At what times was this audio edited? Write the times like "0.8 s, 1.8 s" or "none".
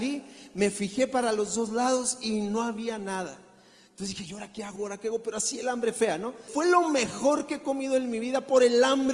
4.8 s, 6.5 s